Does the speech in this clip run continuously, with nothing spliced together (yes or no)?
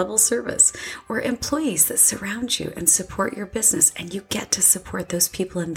yes